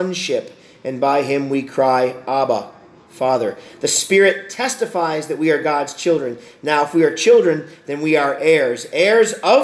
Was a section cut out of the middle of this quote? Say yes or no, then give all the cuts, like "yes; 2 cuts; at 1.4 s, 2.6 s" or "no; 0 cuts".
no; 0 cuts